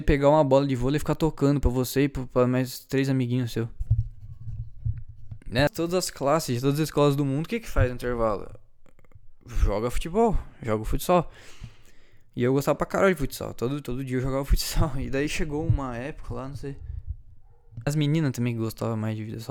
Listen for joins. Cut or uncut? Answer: cut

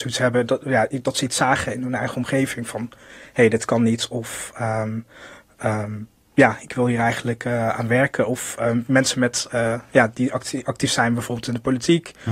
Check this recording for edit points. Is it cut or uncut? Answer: uncut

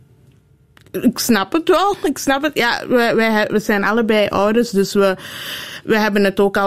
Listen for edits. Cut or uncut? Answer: uncut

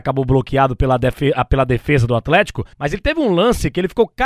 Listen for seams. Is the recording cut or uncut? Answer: cut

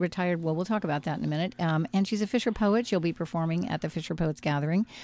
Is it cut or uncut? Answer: uncut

